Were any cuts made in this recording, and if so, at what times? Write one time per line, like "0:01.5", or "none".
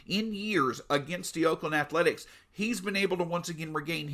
none